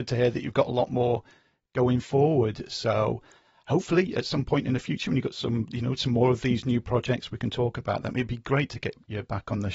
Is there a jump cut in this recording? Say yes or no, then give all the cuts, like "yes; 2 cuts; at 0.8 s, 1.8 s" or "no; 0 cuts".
no; 0 cuts